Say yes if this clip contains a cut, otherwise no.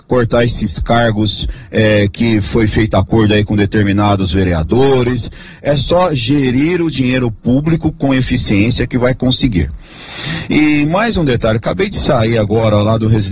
no